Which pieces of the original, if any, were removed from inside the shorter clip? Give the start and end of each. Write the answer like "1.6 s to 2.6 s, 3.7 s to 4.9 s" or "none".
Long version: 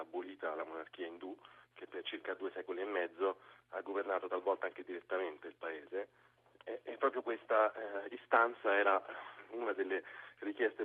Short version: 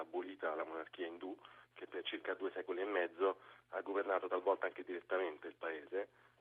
none